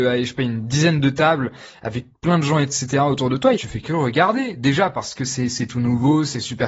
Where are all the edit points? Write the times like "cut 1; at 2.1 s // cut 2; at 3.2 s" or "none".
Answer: cut 1; at 3.6 s

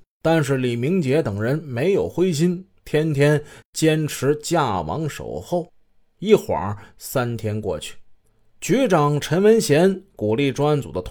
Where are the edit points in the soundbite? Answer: none

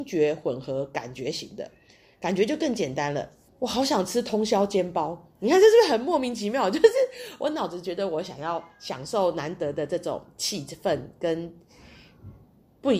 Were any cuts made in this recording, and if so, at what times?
cut 1; at 3.5 s

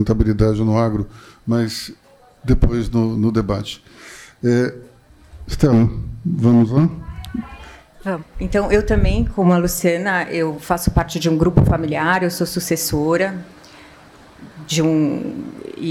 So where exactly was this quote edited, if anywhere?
cut 1; at 8.2 s

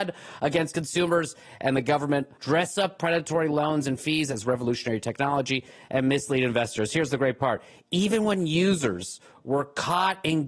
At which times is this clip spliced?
cut 1; at 2.4 s

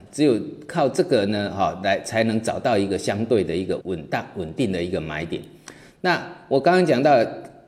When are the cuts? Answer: cut 1; at 3.8 s

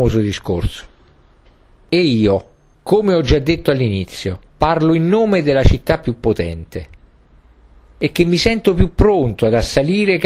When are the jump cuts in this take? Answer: cut 1; at 2.7 s // cut 2; at 4.5 s

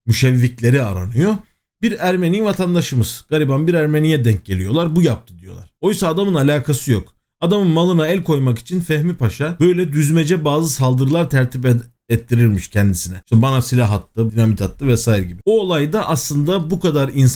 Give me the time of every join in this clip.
cut 1; at 14.3 s // cut 2; at 15.4 s

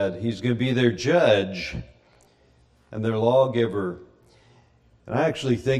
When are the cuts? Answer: none

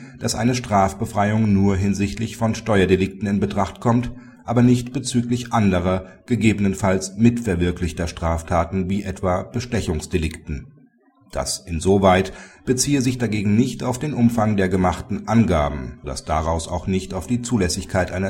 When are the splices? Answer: cut 1; at 16.0 s

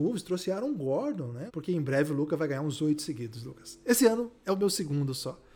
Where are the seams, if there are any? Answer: cut 1; at 1.5 s

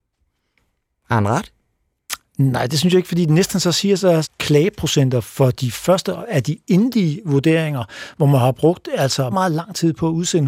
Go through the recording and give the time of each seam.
cut 1; at 4.2 s // cut 2; at 9.3 s

